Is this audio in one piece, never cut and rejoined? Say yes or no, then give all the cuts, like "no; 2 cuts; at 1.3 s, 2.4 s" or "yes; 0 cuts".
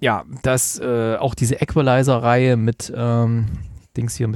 yes; 0 cuts